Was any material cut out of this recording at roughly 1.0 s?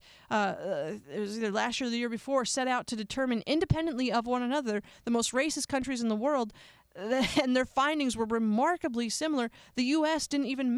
no; 0 cuts

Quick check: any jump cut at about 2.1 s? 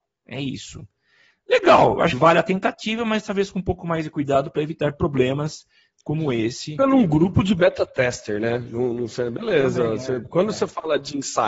yes; 2 cuts; at 2.1 s, 6.8 s

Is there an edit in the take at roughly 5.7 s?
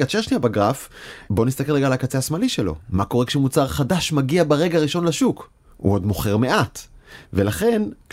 yes; 1 cut; at 5.7 s

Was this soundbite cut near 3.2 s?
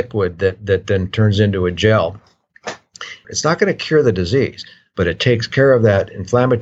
yes; 1 cut; at 3.2 s

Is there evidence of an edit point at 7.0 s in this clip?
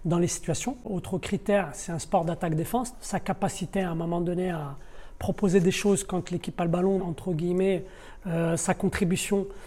yes; 2 cuts; at 2.9 s, 7.0 s

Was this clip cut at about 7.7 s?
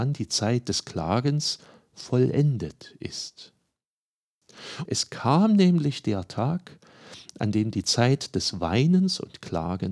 no; 1 cut; at 4.9 s

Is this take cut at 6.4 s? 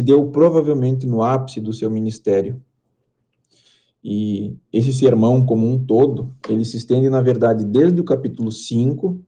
no; 0 cuts

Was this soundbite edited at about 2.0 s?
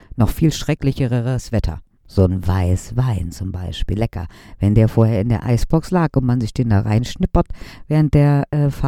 yes; 1 cut; at 2.0 s

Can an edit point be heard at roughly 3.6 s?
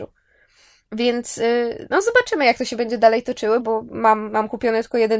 yes; 1 cut; at 3.6 s

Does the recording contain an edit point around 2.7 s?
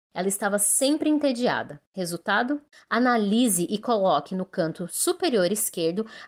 yes; 1 cut; at 2.7 s

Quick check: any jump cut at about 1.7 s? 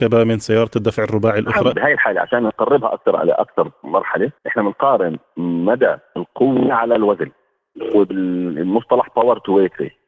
yes; 2 cuts; at 1.7 s, 4.4 s

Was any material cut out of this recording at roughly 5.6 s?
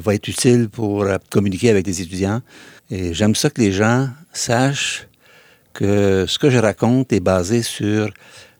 no; 1 cut; at 2.8 s

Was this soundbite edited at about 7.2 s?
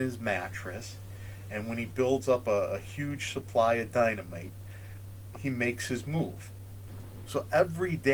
yes; 2 cuts; at 5.3 s, 7.2 s

